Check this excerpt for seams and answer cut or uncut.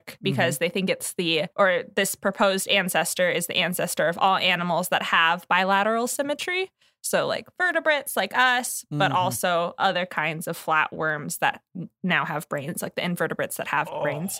uncut